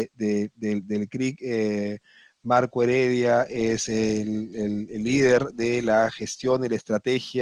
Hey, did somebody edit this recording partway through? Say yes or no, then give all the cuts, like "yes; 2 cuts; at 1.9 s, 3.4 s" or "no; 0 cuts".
no; 0 cuts